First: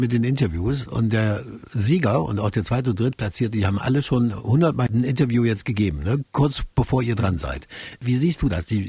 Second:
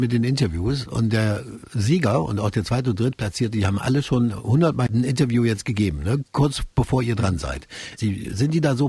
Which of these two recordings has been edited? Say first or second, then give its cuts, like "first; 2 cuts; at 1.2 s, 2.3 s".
second; 1 cut; at 8.0 s